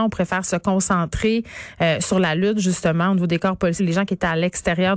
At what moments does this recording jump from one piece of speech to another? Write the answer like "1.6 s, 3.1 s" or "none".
3.8 s

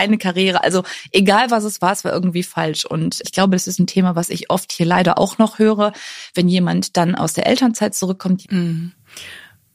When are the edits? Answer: 3.2 s, 8.4 s

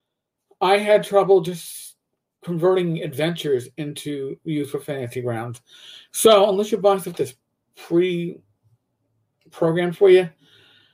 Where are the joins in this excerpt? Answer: none

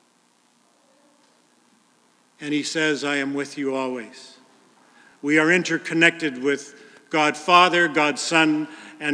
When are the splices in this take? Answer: none

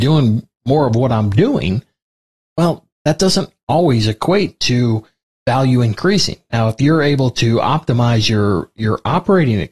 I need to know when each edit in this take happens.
none

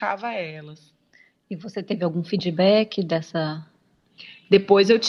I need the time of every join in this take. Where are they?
none

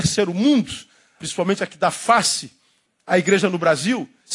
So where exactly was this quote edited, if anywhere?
1.2 s

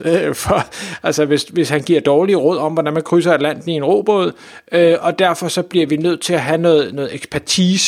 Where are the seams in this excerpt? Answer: none

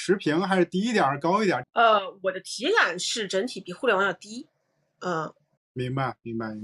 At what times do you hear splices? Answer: 1.6 s, 5.6 s

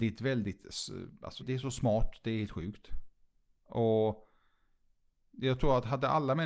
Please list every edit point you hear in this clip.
1.4 s

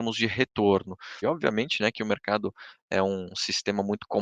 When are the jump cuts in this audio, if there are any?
1.2 s, 3.3 s

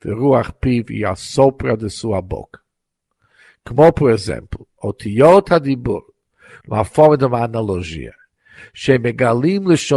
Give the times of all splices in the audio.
6.6 s

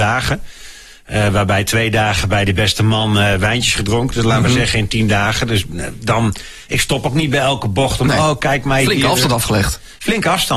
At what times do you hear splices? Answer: none

